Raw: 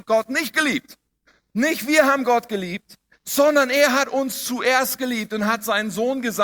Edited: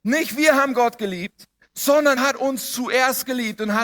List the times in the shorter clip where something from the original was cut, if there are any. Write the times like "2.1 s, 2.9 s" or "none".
2.2 s